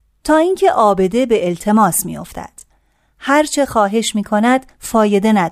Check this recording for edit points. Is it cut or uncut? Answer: uncut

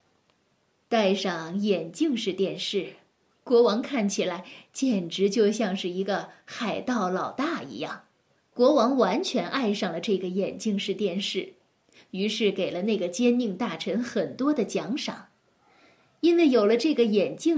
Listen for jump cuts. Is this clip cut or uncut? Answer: uncut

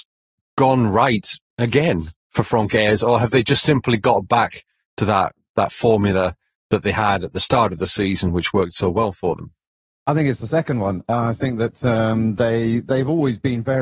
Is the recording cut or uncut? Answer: uncut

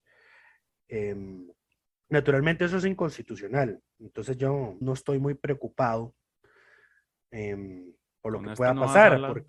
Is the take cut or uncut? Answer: cut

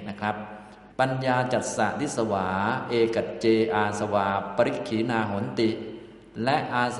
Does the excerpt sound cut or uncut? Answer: cut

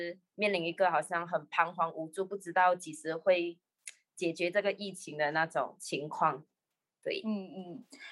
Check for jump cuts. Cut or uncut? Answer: uncut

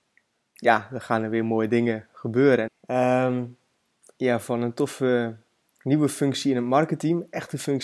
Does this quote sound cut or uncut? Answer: cut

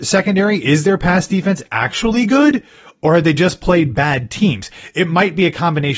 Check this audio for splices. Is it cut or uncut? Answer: uncut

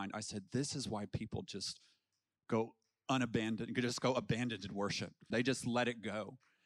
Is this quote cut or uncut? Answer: cut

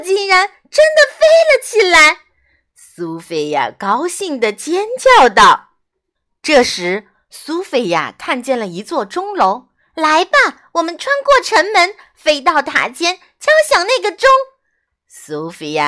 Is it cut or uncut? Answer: uncut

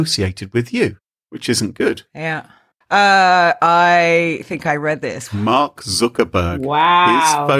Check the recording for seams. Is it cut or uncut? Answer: cut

